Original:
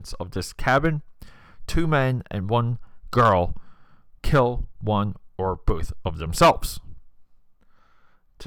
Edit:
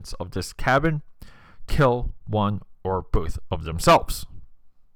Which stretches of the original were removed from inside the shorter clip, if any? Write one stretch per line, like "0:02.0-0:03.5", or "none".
0:01.7-0:04.2

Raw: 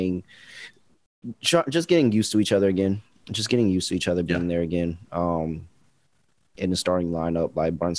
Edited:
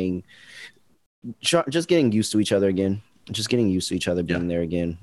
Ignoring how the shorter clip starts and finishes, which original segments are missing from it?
none

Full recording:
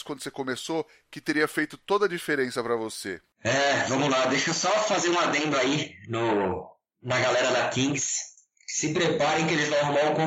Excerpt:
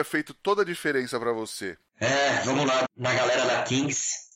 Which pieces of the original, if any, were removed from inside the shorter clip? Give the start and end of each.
0:04.3-0:06.9

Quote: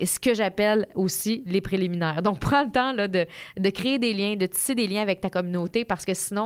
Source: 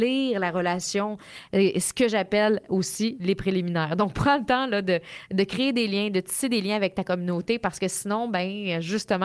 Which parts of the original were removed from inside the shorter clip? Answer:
none

